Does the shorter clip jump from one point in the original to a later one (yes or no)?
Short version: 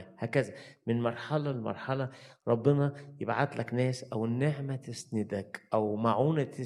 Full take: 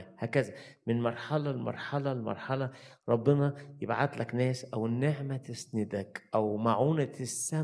yes